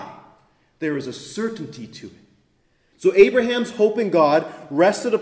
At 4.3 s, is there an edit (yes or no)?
no